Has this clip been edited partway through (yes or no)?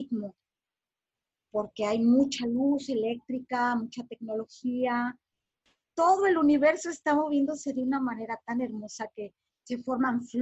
no